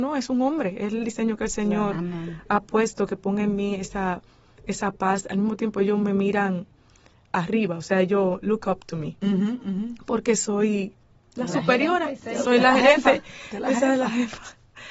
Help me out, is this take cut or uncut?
uncut